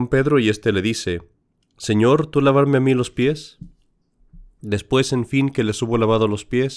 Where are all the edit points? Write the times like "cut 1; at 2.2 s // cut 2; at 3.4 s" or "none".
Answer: cut 1; at 4.6 s